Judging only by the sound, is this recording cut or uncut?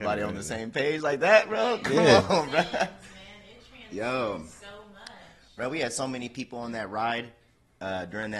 uncut